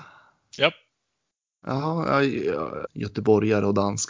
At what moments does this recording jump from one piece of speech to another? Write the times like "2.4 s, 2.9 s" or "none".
2.9 s